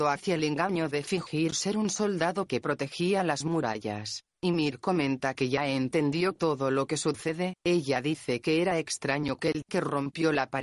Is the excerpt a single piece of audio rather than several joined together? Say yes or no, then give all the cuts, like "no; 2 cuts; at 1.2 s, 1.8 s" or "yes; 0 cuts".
no; 2 cuts; at 4.3 s, 9.6 s